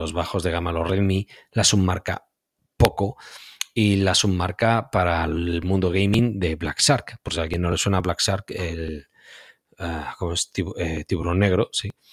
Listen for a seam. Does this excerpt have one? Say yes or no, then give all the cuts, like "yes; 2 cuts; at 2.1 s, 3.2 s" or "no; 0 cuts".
no; 0 cuts